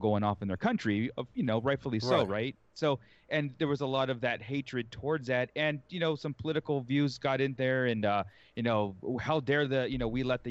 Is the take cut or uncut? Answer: uncut